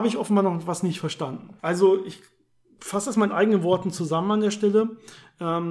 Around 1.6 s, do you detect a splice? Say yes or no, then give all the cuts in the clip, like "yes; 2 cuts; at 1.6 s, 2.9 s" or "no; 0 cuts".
yes; 1 cut; at 1.6 s